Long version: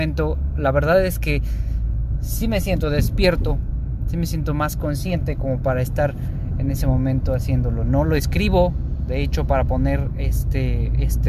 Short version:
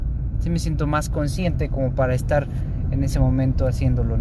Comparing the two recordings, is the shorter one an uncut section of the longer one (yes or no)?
yes